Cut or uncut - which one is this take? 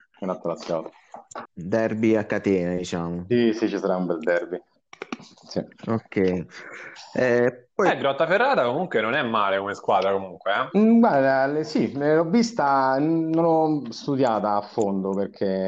cut